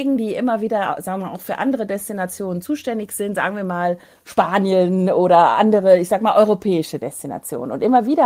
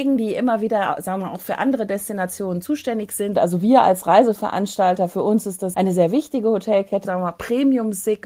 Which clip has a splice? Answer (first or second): second